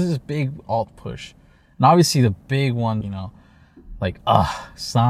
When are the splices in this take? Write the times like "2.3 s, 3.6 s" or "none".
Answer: 3.0 s, 4.2 s